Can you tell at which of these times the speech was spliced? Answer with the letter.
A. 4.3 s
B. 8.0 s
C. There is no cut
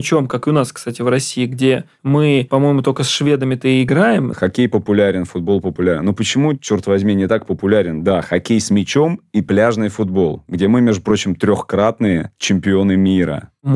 A